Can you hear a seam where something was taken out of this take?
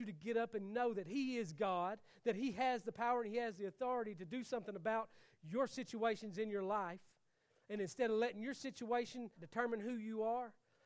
yes; 1 cut; at 9.4 s

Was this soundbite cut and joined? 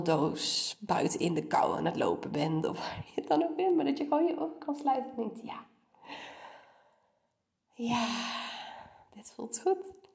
no; 0 cuts

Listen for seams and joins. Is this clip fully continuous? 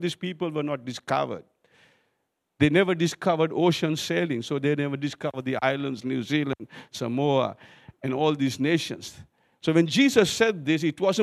no; 1 cut; at 6.0 s

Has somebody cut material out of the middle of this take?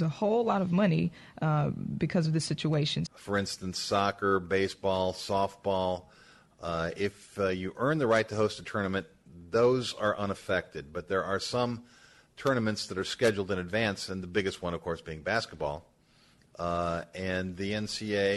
yes; 1 cut; at 3.1 s

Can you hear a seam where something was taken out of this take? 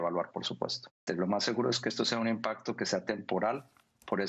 yes; 1 cut; at 1.1 s

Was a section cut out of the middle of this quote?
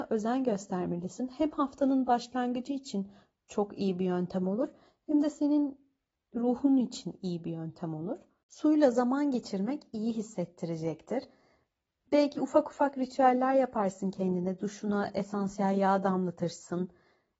no; 0 cuts

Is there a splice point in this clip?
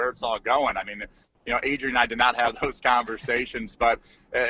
no; 0 cuts

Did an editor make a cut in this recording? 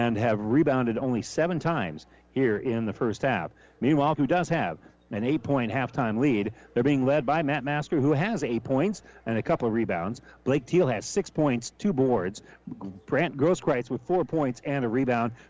yes; 1 cut; at 4.2 s

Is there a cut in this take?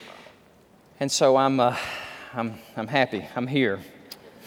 no; 0 cuts

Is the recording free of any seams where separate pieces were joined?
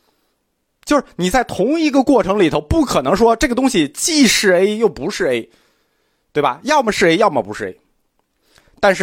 yes; 0 cuts

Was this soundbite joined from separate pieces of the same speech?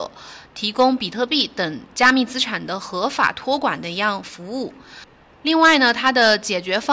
yes; 1 cut; at 5.3 s

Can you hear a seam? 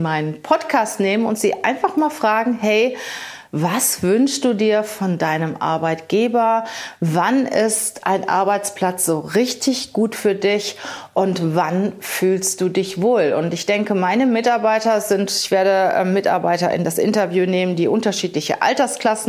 no; 0 cuts

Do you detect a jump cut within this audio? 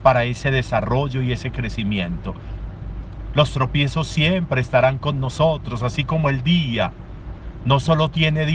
no; 0 cuts

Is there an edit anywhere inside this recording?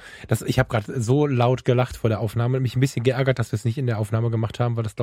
no; 0 cuts

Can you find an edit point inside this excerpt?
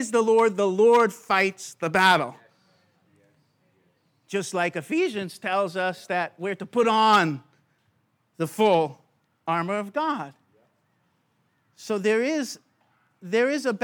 no; 0 cuts

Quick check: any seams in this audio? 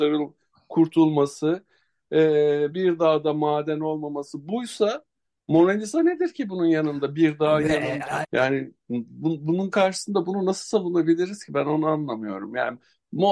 yes; 2 cuts; at 2.7 s, 8.2 s

